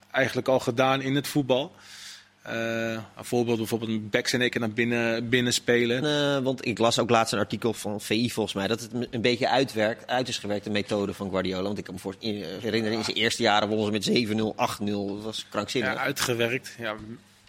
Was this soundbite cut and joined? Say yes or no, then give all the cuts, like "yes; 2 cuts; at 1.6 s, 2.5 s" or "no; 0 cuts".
yes; 1 cut; at 6.0 s